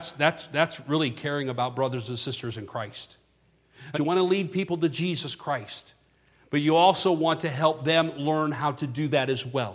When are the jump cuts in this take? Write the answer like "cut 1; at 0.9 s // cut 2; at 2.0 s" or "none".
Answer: cut 1; at 3.9 s